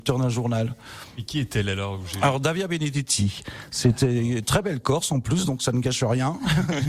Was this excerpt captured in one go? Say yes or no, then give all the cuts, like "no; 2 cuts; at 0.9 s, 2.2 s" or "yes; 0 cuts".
yes; 0 cuts